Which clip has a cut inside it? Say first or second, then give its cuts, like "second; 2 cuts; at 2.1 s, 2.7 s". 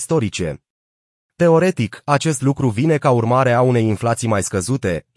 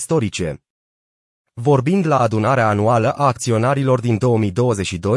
first; 1 cut; at 1.1 s